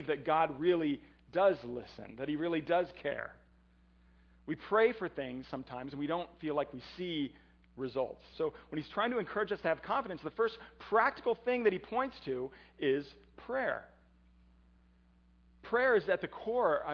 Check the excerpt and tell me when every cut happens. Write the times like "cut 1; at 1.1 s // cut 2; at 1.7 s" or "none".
cut 1; at 8.3 s